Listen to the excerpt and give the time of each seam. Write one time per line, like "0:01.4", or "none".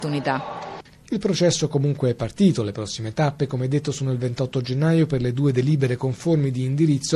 none